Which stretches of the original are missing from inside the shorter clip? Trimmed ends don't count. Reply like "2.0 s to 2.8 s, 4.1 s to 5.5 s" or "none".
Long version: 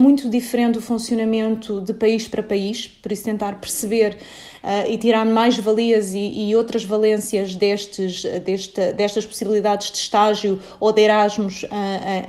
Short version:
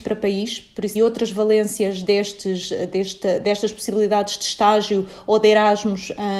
3.2 s to 6.5 s